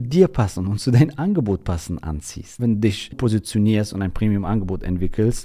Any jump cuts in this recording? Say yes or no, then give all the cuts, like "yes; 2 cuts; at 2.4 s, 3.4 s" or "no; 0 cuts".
yes; 1 cut; at 3.1 s